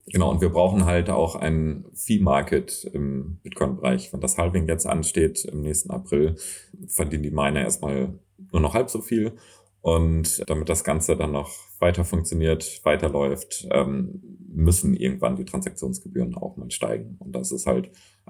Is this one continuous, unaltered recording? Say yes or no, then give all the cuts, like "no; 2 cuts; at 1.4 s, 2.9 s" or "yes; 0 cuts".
yes; 0 cuts